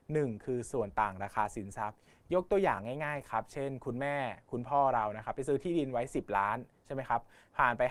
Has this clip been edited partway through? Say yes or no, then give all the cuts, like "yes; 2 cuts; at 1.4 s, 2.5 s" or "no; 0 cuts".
no; 0 cuts